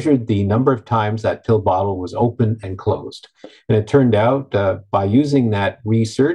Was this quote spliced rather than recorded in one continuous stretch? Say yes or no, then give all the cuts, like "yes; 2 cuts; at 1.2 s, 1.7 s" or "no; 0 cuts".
no; 0 cuts